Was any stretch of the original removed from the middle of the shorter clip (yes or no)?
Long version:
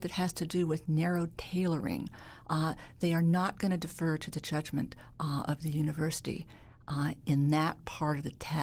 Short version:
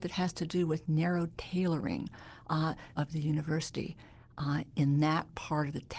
yes